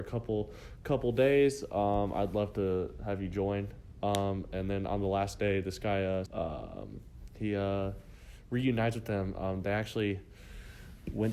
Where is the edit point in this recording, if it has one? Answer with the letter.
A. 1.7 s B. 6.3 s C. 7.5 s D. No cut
B